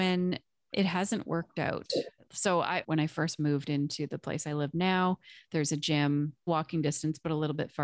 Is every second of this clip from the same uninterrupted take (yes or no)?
no